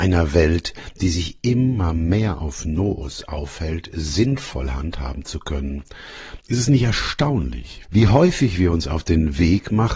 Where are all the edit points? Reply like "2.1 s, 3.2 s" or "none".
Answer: 6.4 s, 7.8 s